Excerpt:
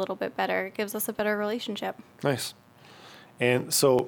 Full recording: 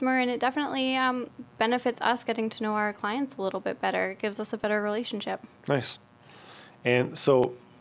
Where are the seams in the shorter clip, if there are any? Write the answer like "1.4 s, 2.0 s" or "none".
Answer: none